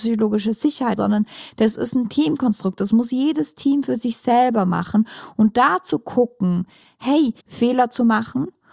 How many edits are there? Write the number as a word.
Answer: two